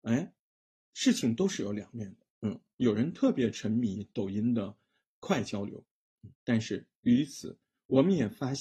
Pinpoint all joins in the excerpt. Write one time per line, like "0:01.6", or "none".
0:02.3
0:06.3